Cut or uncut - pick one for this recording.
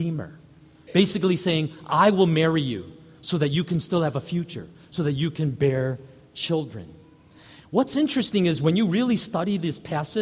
cut